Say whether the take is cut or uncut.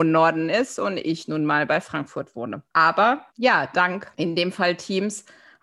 cut